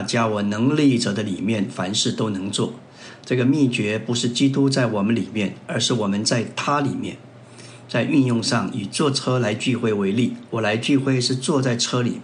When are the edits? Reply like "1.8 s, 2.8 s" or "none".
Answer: none

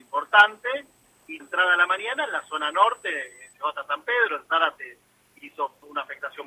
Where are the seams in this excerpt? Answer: 1.4 s

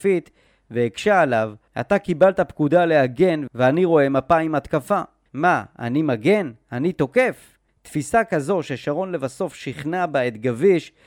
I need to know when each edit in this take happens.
5.3 s

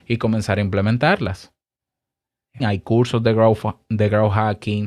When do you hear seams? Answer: 2.6 s

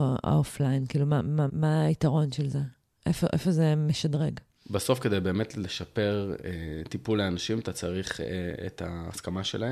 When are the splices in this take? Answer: 1.5 s

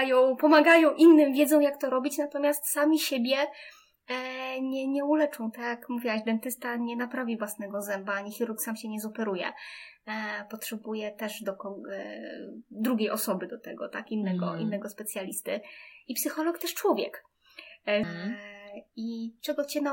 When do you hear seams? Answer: 18.0 s

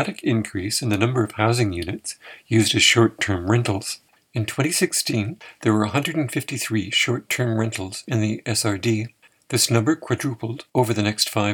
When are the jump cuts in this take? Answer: none

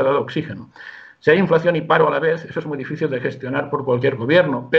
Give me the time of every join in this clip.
none

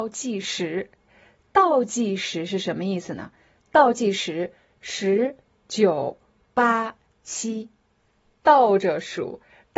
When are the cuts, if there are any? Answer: none

